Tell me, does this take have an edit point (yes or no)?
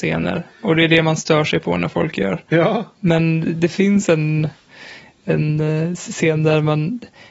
no